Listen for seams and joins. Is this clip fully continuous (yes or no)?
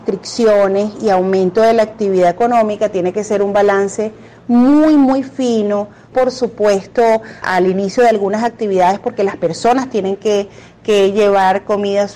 no